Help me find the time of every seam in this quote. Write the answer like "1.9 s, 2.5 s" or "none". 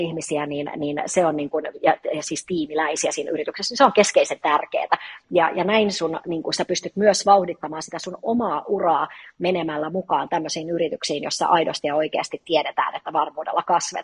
5.2 s